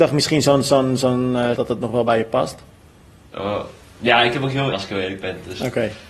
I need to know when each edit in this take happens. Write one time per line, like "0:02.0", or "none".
0:01.5
0:04.7